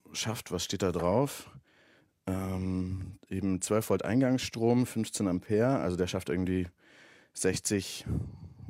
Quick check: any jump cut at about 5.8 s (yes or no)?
no